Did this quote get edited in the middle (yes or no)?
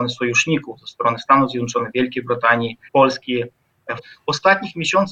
yes